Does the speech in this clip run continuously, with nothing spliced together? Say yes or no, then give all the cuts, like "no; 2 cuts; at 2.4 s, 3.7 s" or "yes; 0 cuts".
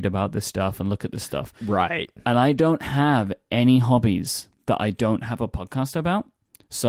yes; 0 cuts